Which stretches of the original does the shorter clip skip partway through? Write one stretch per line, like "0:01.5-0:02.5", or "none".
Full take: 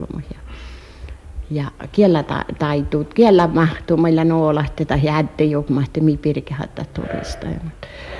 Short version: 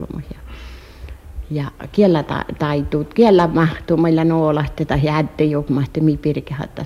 none